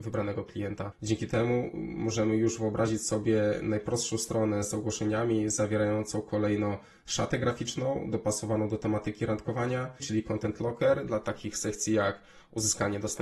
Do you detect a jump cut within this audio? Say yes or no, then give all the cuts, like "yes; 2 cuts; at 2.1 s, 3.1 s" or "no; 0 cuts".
yes; 2 cuts; at 0.9 s, 10.0 s